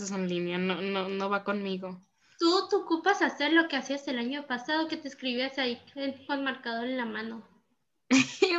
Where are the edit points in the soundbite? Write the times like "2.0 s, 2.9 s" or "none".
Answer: none